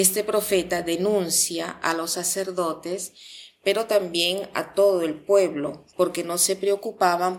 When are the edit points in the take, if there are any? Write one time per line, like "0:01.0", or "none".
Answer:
0:05.9